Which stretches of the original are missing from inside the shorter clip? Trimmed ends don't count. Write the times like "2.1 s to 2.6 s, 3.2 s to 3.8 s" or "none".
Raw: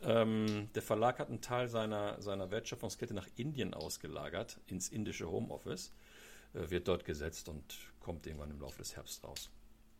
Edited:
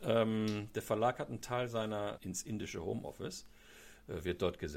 2.2 s to 4.6 s